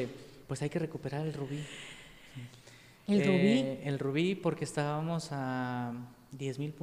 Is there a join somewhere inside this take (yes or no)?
no